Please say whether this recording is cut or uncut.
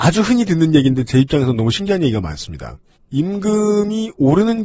uncut